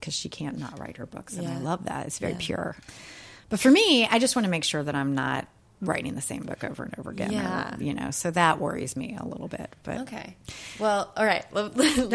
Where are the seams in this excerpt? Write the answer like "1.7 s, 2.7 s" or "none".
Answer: none